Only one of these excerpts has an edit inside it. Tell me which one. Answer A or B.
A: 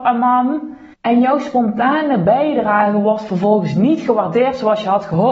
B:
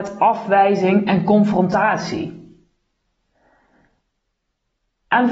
A